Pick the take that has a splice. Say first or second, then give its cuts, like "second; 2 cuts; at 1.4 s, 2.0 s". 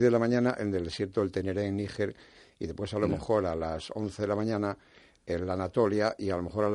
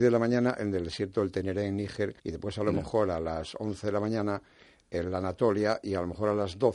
second; 1 cut; at 2.2 s